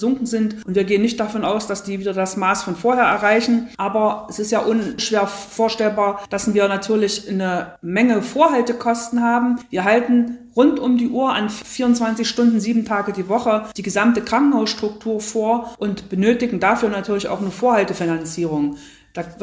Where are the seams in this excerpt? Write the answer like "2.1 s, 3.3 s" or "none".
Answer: 3.8 s